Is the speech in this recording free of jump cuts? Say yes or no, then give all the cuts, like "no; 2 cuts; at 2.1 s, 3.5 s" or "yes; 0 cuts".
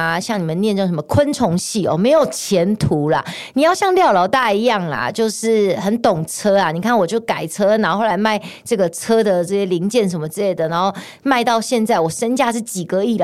yes; 0 cuts